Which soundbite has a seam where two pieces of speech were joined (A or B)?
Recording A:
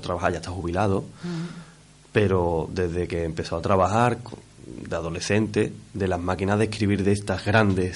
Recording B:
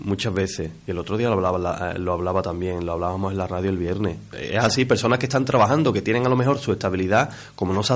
B